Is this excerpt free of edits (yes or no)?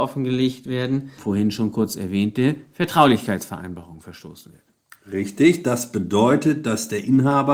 no